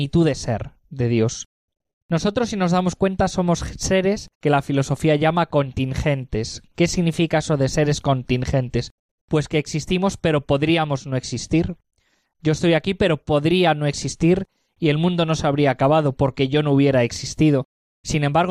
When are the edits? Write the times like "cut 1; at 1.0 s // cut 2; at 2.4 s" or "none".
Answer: cut 1; at 4.3 s